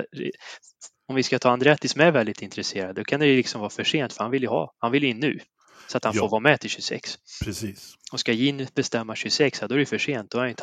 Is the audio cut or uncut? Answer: uncut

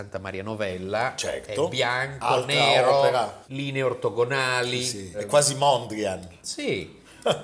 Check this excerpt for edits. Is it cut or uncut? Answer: uncut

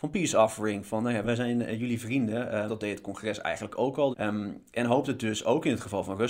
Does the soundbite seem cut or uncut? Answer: cut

